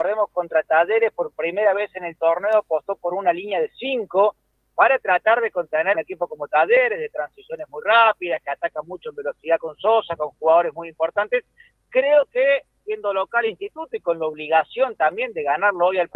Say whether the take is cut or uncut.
cut